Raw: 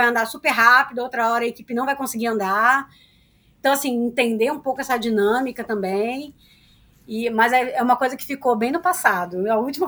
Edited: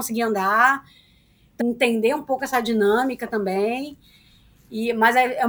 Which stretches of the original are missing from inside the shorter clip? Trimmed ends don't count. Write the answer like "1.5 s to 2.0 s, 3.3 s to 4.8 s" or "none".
3.6 s to 4.0 s